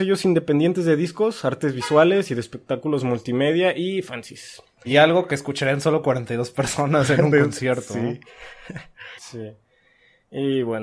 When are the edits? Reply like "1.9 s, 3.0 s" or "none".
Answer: 4.8 s, 9.2 s